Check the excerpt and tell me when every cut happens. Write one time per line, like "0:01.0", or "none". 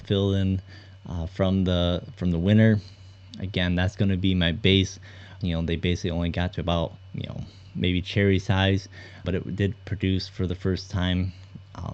0:05.4
0:09.2